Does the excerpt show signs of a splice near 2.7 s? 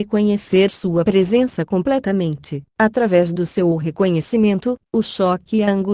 yes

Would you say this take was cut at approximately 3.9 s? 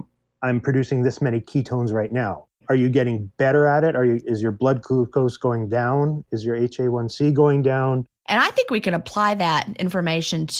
no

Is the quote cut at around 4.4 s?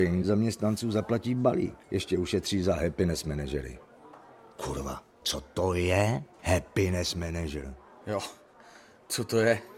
no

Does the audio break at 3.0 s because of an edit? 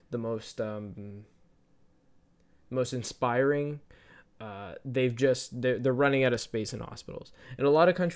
no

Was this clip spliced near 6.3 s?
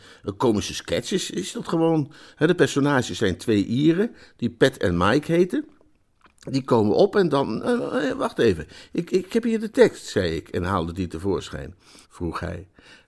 no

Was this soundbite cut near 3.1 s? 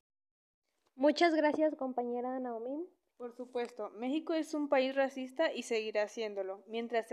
yes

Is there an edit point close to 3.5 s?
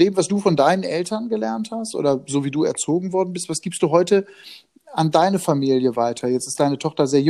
no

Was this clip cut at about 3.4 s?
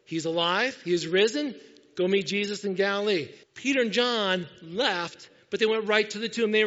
yes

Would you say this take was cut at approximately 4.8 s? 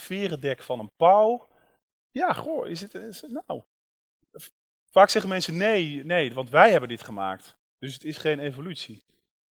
no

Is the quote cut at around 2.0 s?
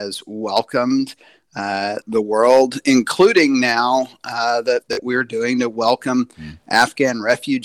yes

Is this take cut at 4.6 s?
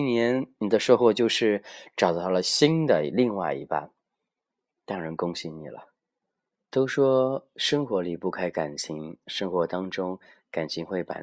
no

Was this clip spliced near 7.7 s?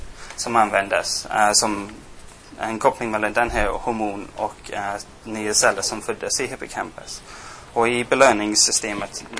yes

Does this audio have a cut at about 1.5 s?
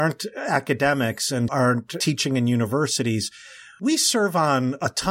yes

